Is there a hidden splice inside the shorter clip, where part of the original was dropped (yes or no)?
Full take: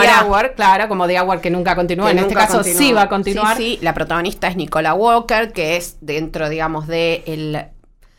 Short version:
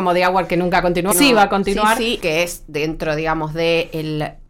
yes